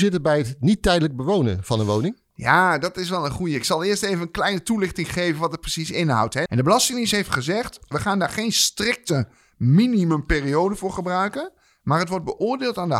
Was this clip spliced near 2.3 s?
no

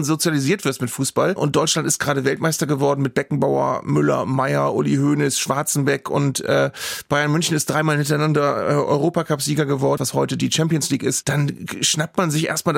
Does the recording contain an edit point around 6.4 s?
no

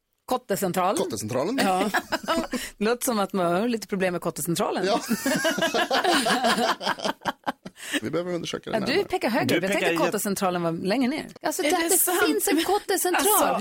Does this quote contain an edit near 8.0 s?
yes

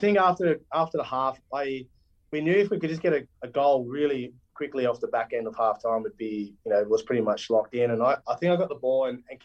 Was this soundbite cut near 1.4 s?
no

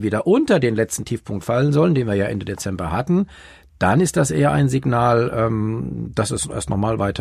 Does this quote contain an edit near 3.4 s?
no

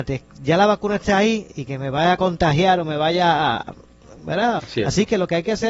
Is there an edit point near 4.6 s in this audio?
yes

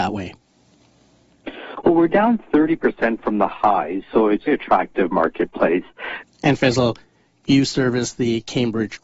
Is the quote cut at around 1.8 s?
no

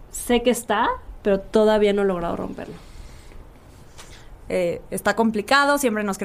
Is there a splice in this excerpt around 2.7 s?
no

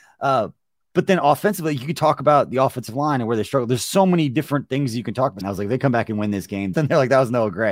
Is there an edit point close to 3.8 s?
no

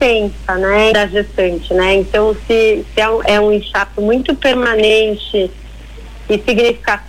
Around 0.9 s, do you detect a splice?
yes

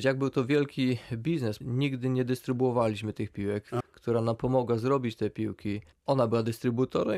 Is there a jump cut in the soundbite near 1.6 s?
yes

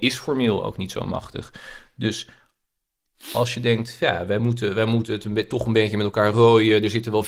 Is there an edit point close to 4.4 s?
no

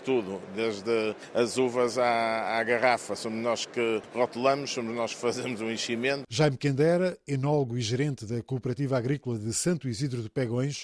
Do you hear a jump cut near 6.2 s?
yes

